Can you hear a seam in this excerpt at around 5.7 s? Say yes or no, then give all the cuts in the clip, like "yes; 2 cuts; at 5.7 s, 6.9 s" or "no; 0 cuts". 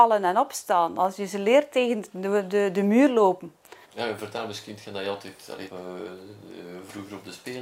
yes; 2 cuts; at 3.8 s, 5.7 s